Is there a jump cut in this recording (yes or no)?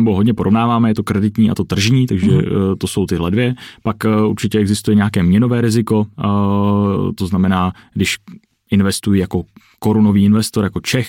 no